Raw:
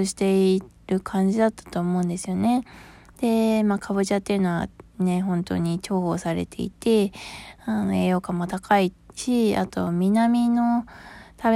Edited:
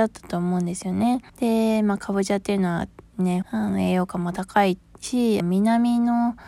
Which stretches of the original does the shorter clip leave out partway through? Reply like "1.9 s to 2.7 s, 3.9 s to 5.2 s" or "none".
2.7 s to 3.1 s, 5.2 s to 7.6 s, 9.5 s to 9.9 s

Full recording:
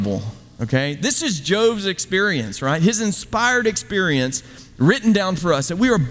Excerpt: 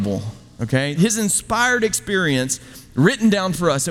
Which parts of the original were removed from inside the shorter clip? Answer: 1.0 s to 2.8 s

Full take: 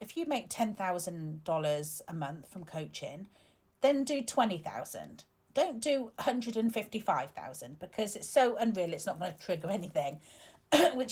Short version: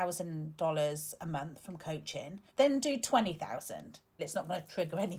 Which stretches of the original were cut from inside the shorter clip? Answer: 3.4 s to 3.7 s, 5.4 s to 8.9 s

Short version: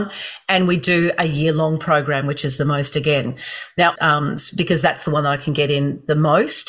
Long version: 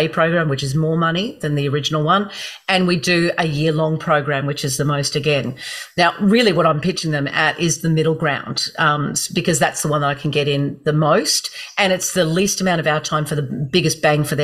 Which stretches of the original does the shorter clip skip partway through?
6.1 s to 8.7 s

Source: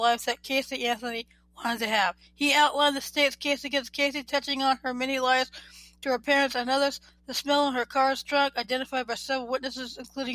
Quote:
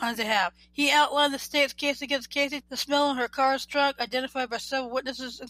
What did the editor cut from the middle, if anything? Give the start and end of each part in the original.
4.2 s to 7.2 s

